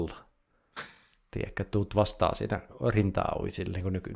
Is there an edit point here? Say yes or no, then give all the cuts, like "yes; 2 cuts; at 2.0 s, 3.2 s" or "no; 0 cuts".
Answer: no; 0 cuts